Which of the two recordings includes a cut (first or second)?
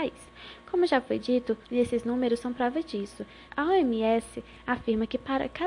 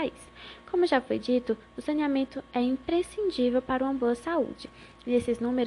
first